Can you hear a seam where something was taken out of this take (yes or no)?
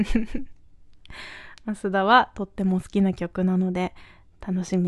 no